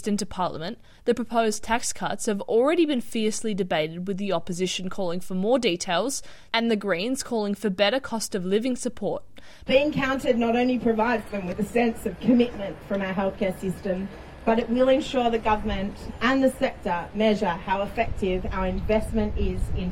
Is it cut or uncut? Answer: cut